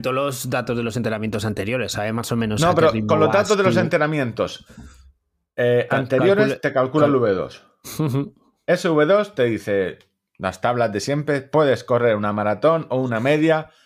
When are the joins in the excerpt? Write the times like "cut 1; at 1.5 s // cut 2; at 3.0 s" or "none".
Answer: none